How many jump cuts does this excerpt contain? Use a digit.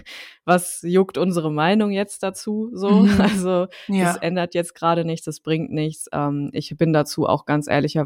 0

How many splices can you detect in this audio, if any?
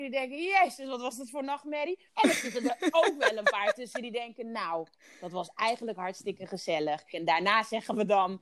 2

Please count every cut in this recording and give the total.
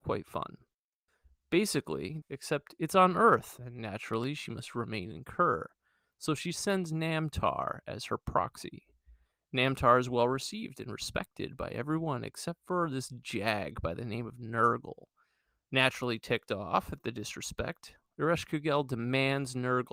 1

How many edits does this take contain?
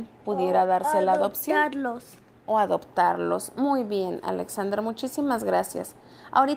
0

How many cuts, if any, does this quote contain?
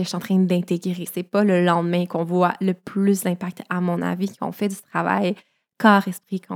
1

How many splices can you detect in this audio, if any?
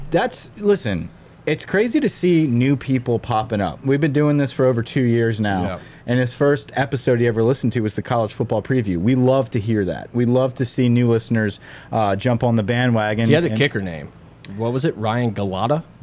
0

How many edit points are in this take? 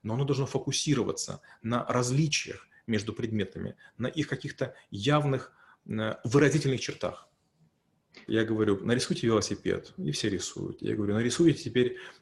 1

